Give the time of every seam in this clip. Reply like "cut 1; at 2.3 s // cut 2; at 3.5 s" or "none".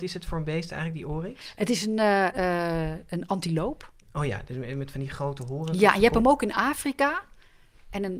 cut 1; at 2.3 s